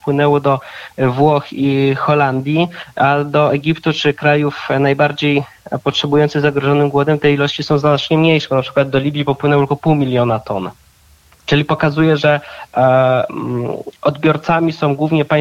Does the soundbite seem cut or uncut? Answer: uncut